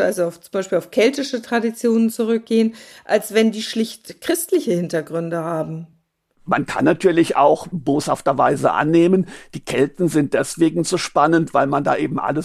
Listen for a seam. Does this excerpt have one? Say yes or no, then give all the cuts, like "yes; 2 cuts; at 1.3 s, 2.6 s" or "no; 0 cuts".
no; 0 cuts